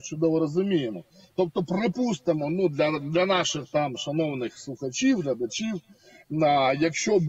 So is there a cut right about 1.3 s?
no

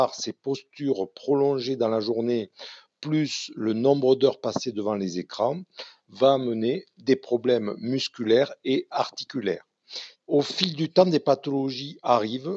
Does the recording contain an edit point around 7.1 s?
no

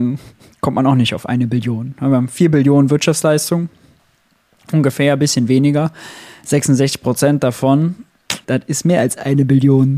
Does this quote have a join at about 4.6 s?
no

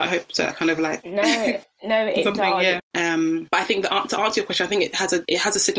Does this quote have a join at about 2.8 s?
yes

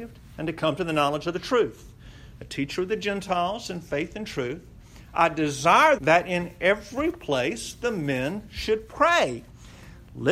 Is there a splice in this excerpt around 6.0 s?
yes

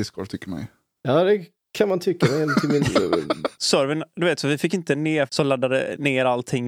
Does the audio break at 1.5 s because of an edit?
no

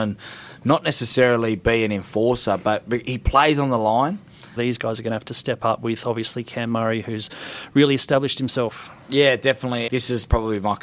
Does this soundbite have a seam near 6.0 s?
no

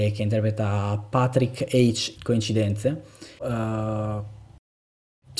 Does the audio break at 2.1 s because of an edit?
yes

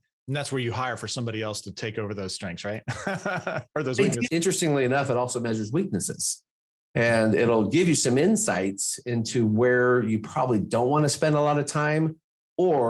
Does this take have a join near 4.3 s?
yes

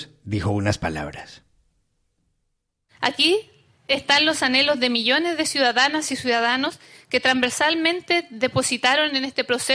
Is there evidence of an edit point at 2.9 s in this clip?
no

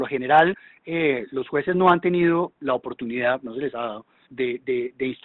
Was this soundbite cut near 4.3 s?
yes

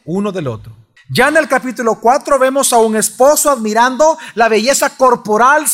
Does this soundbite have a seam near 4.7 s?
no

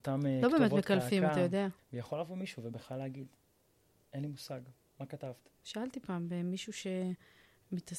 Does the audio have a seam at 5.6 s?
yes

